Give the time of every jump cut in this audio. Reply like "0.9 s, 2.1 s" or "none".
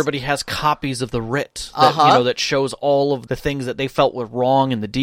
3.3 s